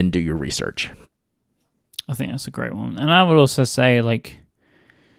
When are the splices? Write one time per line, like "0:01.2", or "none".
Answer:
none

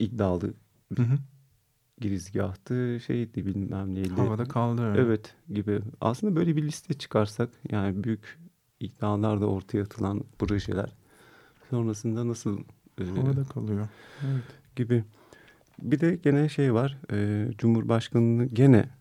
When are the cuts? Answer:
none

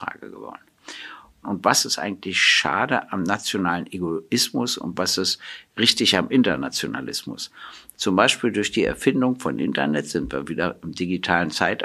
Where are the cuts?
0:01.4
0:07.9

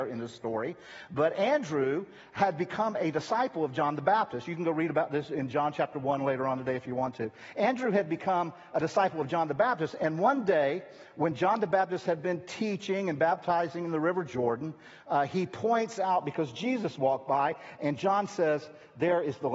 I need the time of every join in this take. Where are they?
none

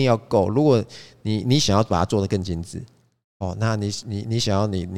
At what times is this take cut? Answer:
none

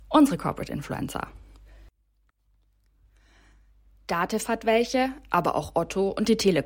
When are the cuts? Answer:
none

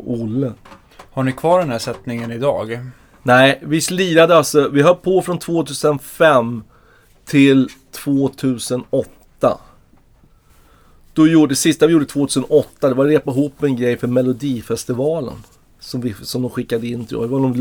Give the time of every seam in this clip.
none

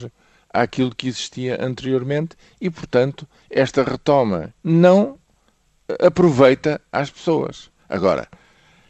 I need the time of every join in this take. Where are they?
0:04.5

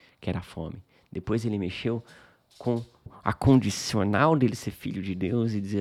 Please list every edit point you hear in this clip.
0:03.1

